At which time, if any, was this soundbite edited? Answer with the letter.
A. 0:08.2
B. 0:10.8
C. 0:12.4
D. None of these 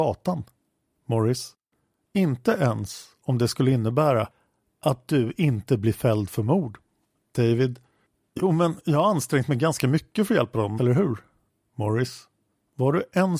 B